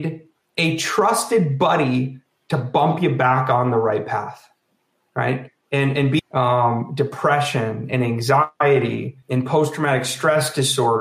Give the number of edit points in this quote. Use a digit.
2